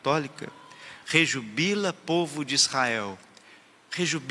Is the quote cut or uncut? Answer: cut